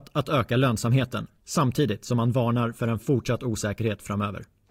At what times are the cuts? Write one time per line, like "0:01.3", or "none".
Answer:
0:01.4

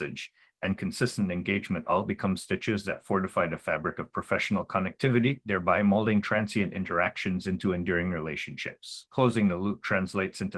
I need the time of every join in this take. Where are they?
0:09.1

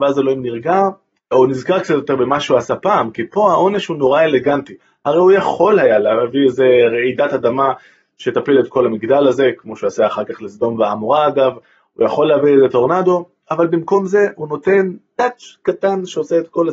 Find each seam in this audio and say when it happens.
0:01.3

